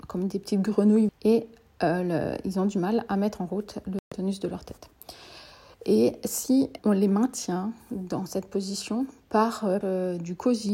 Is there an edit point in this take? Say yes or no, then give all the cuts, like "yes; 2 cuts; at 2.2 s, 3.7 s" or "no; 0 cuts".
yes; 3 cuts; at 1.1 s, 6.8 s, 9.8 s